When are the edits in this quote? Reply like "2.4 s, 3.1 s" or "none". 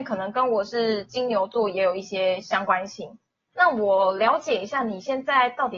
3.5 s